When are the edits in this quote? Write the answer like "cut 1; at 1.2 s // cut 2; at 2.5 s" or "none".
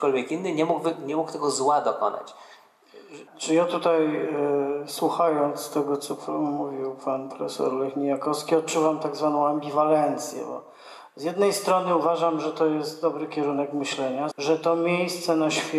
cut 1; at 3.3 s // cut 2; at 14.3 s